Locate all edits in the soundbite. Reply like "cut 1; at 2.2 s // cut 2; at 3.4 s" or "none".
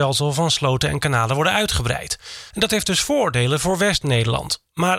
cut 1; at 2.5 s

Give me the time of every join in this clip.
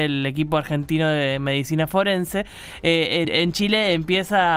cut 1; at 3.2 s

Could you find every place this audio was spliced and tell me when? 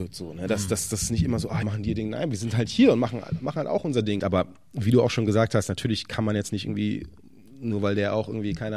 cut 1; at 1.6 s // cut 2; at 4.2 s

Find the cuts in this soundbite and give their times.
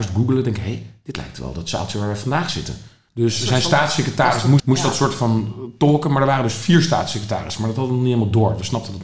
cut 1; at 3.1 s // cut 2; at 4.6 s

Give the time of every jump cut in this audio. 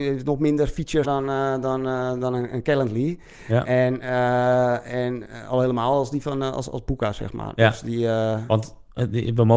cut 1; at 1.0 s

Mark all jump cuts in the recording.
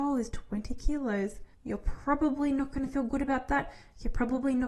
cut 1; at 1.5 s

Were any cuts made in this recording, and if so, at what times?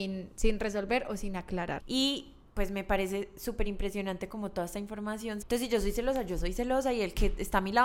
cut 1; at 1.8 s // cut 2; at 5.4 s

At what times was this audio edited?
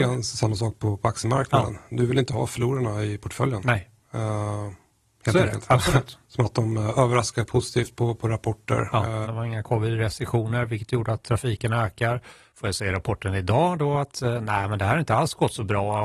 cut 1; at 6.2 s // cut 2; at 9.2 s

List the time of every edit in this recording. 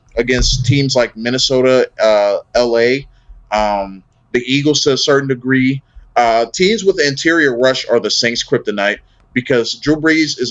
none

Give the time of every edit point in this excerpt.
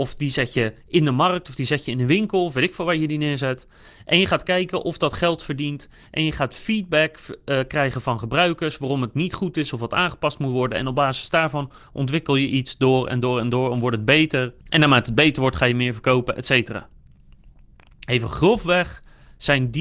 cut 1; at 14.6 s

